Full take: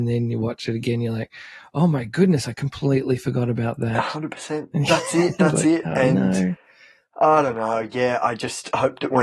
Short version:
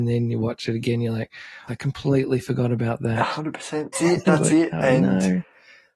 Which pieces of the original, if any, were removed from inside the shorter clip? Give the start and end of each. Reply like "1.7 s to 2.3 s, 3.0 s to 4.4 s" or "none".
1.7 s to 2.4 s, 4.7 s to 5.0 s